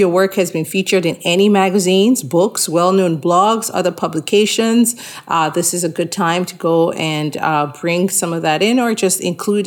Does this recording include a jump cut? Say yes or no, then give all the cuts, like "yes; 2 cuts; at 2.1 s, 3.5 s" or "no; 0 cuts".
no; 0 cuts